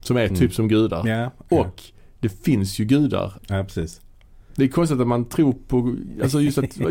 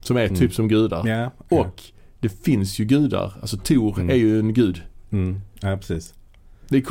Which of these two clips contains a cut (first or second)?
first